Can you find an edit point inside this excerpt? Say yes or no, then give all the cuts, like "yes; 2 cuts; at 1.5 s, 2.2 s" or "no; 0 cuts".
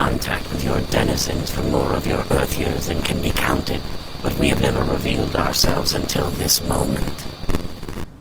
no; 0 cuts